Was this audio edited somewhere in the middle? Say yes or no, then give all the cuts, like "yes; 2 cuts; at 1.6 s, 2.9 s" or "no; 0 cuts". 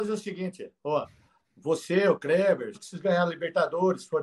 yes; 1 cut; at 2.7 s